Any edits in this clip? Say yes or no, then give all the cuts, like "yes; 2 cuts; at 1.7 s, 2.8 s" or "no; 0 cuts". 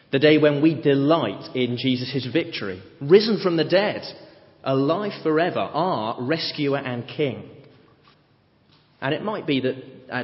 no; 0 cuts